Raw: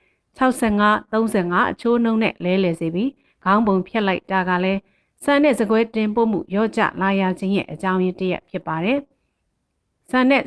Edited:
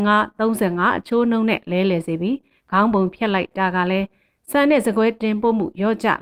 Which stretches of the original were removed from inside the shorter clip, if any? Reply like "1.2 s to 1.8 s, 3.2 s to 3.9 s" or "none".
none